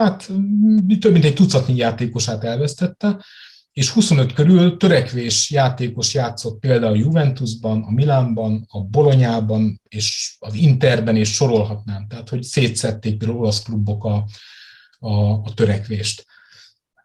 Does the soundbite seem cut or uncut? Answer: uncut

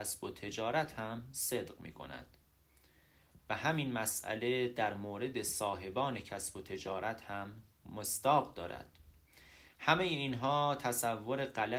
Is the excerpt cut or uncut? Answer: cut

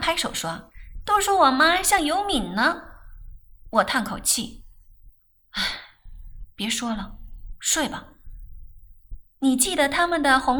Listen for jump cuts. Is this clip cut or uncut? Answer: uncut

